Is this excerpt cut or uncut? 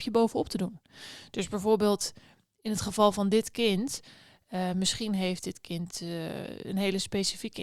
uncut